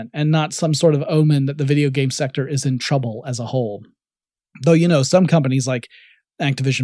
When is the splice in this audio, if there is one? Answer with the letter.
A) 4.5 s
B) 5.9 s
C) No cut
C